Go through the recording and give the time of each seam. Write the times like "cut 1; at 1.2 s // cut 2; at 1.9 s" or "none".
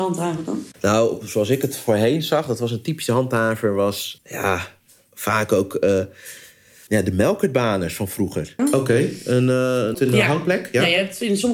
cut 1; at 8.6 s // cut 2; at 9.9 s